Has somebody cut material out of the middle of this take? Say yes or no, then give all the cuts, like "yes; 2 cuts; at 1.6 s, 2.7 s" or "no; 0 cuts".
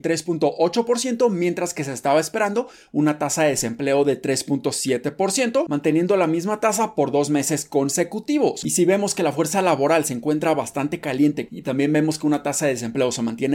yes; 2 cuts; at 8.6 s, 11.5 s